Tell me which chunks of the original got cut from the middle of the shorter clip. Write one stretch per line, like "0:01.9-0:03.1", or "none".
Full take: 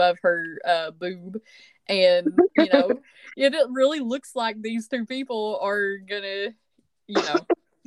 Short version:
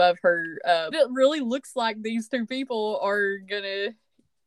0:00.9-0:03.5